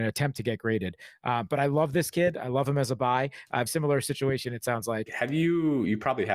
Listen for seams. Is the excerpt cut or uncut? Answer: cut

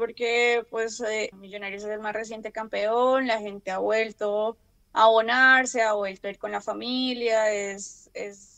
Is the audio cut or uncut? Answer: cut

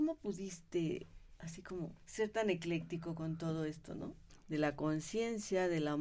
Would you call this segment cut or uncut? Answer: cut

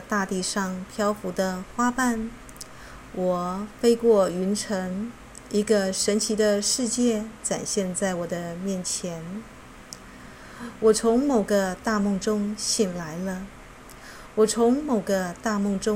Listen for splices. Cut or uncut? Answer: uncut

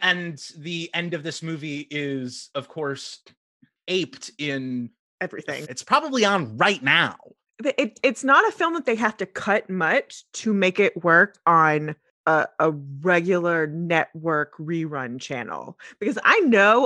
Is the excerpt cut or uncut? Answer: cut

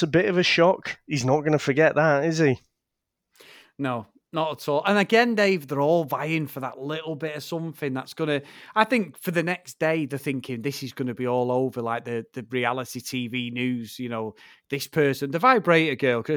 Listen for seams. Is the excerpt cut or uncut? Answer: uncut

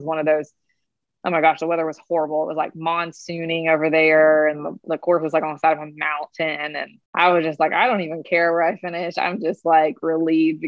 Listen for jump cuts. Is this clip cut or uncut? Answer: cut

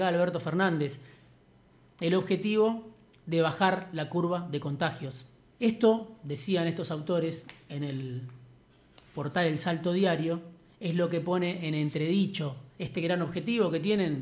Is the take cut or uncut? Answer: cut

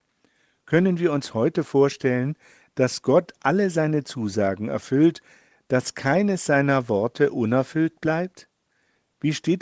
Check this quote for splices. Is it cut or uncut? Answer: uncut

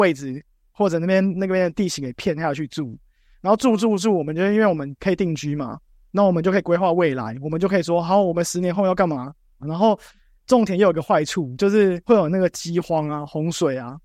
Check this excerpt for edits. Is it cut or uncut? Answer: cut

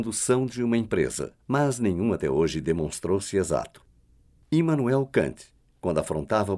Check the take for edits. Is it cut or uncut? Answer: cut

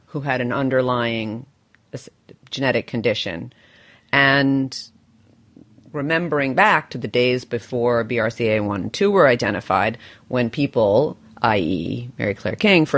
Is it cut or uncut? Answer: uncut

